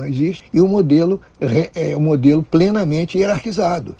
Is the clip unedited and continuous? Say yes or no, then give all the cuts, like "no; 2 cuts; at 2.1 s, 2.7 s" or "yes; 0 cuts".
yes; 0 cuts